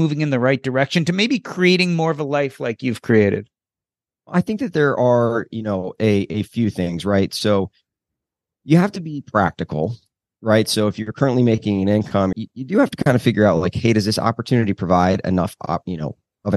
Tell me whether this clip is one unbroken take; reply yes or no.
no